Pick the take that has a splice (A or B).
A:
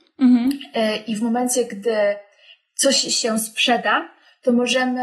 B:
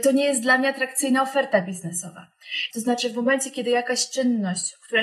B